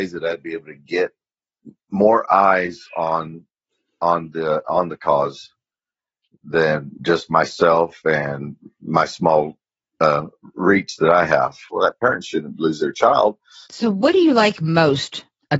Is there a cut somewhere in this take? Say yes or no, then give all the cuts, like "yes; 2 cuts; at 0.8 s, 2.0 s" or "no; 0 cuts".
yes; 2 cuts; at 11.7 s, 13.7 s